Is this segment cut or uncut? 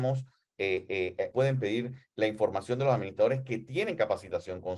cut